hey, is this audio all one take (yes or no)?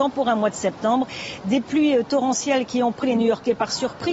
yes